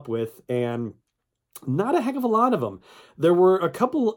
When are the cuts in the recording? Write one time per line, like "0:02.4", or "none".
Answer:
none